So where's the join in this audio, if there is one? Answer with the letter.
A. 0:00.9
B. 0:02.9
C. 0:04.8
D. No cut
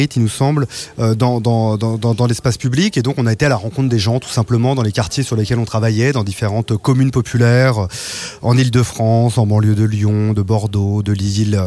D